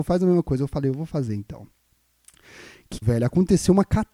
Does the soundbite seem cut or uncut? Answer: cut